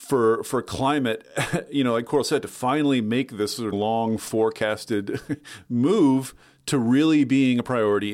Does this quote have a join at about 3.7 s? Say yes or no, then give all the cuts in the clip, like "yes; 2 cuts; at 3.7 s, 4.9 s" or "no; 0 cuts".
yes; 1 cut; at 3.7 s